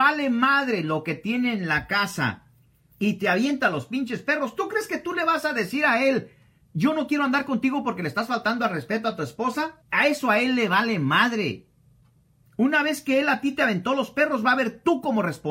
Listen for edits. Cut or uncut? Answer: cut